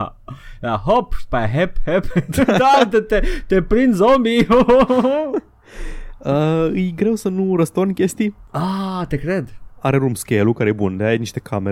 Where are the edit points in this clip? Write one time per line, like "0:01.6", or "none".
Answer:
none

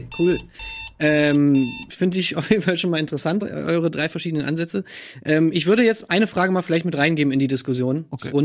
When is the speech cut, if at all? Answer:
0:03.4

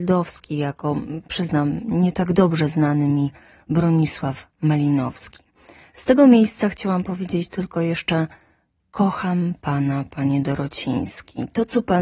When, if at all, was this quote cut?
none

